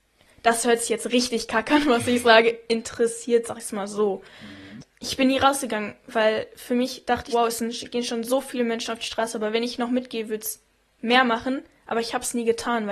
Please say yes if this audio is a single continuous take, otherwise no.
no